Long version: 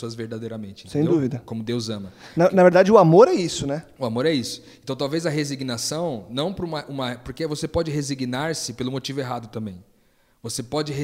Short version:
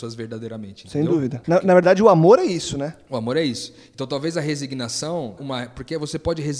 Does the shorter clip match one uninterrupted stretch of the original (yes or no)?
no